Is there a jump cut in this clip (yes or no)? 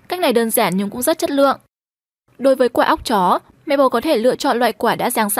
no